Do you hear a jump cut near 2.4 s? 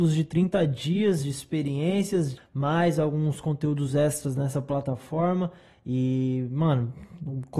yes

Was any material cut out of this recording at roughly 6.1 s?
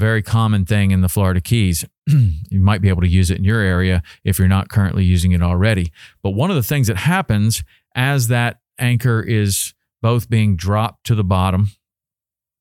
no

